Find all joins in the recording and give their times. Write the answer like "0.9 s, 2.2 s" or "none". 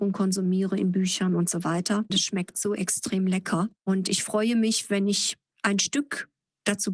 2.1 s, 3.7 s